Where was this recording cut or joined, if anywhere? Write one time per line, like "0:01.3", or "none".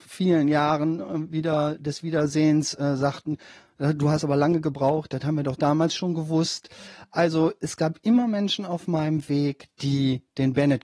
none